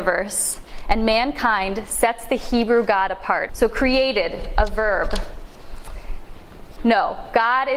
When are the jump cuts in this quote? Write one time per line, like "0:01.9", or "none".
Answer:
0:03.5
0:06.8